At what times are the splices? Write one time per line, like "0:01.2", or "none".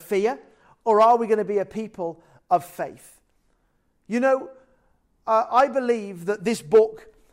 none